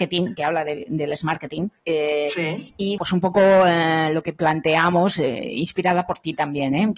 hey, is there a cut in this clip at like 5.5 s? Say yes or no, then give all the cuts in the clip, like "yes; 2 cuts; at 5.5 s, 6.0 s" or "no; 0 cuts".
no; 1 cut; at 3.0 s